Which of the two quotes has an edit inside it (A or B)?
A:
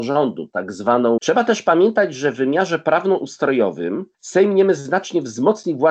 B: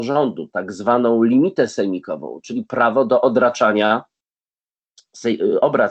A